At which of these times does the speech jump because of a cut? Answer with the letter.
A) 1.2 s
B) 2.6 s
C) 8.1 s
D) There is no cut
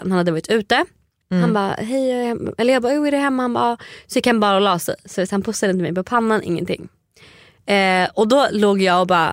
A